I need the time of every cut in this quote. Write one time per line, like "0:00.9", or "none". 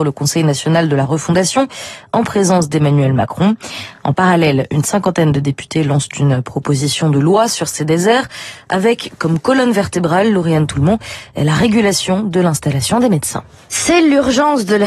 none